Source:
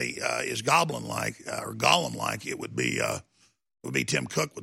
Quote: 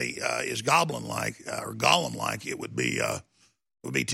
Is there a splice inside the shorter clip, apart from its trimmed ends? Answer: no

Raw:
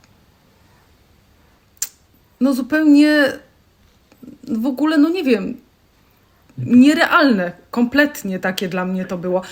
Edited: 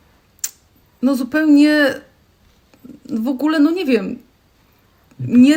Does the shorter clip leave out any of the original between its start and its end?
no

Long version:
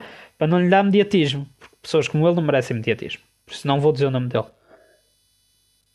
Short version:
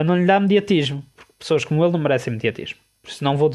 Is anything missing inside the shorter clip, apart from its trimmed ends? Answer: no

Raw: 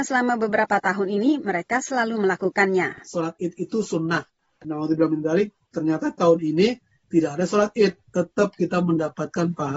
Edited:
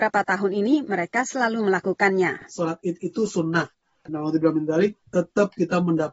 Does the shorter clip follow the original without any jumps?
no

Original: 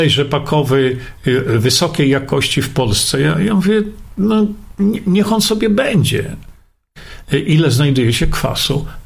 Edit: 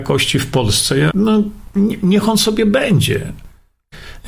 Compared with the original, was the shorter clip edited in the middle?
yes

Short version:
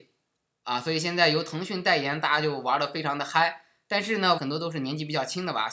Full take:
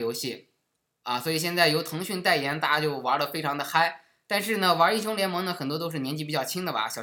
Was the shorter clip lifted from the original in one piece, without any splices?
no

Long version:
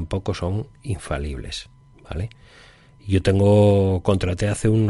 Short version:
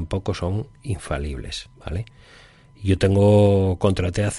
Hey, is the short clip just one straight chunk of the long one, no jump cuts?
no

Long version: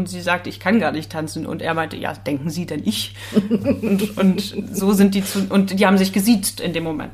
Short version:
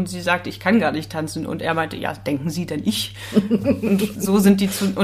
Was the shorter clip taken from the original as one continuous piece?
no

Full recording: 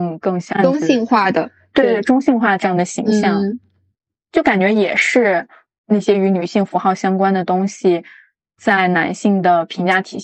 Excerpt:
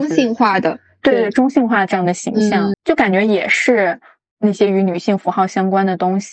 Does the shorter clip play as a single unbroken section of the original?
no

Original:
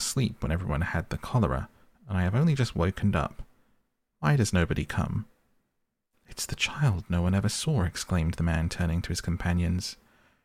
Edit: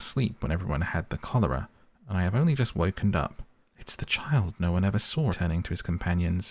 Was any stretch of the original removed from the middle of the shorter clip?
yes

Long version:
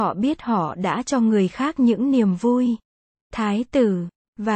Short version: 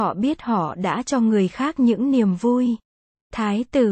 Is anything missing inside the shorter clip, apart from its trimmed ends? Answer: no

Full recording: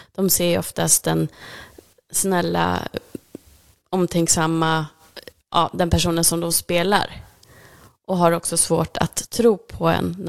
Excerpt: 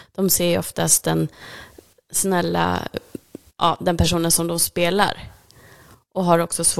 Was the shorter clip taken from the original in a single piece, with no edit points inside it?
no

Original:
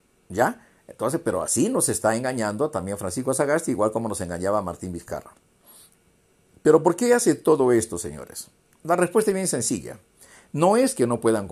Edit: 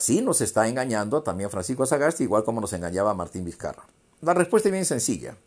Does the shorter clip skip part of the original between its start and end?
yes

